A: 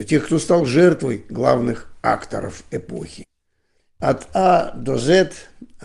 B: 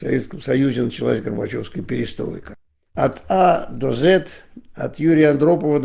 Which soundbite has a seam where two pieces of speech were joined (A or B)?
B